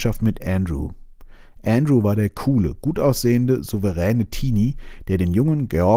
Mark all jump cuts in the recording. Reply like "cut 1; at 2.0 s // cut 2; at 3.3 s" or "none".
none